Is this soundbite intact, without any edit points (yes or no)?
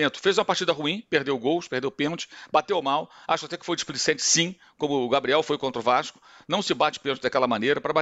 yes